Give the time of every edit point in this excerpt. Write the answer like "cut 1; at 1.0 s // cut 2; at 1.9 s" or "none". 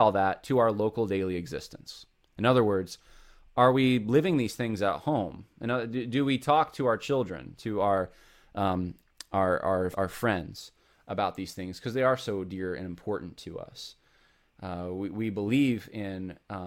cut 1; at 9.9 s